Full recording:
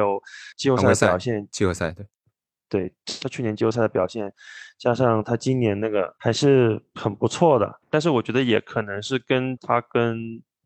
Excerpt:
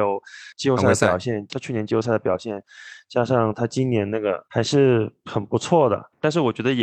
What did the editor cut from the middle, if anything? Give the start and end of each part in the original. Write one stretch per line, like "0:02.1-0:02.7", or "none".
0:01.5-0:03.2